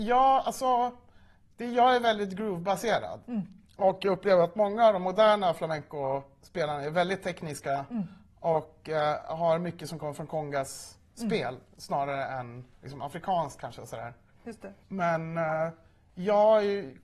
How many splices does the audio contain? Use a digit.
2